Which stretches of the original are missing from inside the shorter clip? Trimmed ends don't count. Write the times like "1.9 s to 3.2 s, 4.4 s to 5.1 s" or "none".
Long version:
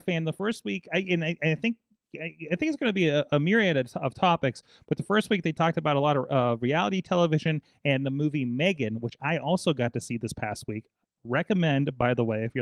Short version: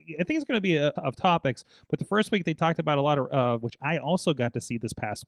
3.3 s to 3.9 s, 6.6 s to 9.0 s